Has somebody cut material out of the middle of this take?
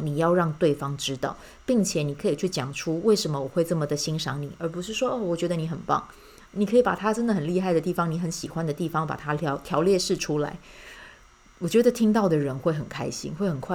no; 0 cuts

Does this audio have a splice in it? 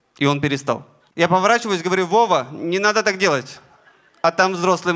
yes; 1 cut; at 1.1 s

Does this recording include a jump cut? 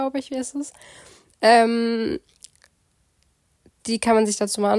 no; 0 cuts

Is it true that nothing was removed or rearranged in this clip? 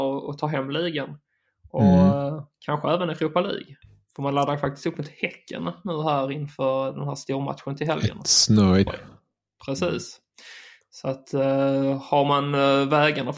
no; 1 cut; at 8.9 s

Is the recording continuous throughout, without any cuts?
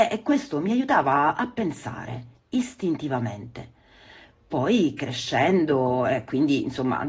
yes; 0 cuts

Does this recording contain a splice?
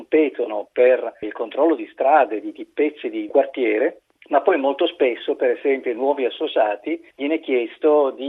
no; 0 cuts

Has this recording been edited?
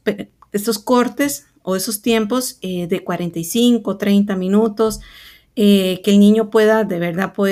no; 0 cuts

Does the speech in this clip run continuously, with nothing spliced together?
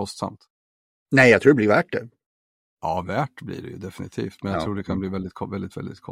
yes; 0 cuts

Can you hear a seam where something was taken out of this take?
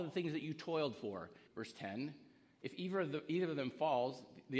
yes; 1 cut; at 1.5 s

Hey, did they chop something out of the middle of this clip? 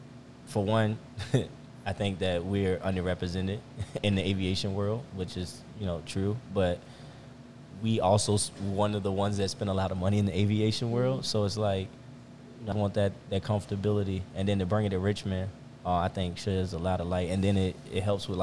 yes; 1 cut; at 12.7 s

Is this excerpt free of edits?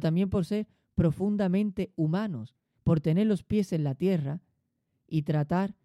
no; 1 cut; at 2.7 s

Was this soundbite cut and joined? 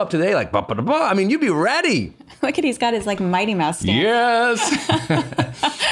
no; 0 cuts

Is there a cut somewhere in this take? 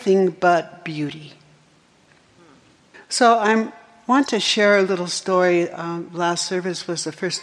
yes; 1 cut; at 2.9 s

